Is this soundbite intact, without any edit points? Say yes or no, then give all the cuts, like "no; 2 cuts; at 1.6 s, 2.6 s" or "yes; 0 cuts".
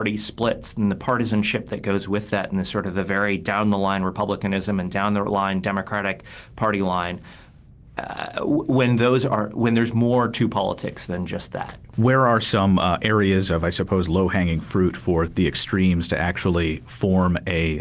yes; 0 cuts